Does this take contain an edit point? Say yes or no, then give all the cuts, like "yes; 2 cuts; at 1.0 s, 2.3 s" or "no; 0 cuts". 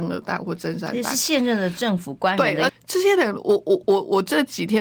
yes; 1 cut; at 2.7 s